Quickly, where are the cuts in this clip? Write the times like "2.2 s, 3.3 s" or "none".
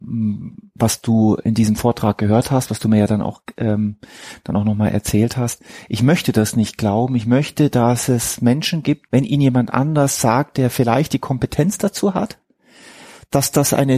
9.1 s